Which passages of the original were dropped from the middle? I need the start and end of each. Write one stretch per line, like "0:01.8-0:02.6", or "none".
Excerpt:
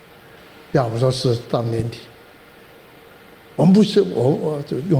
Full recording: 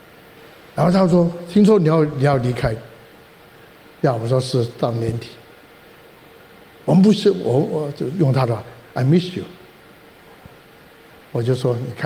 none